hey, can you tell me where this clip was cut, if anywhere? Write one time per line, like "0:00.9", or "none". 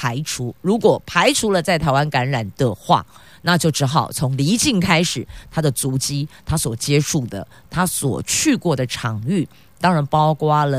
none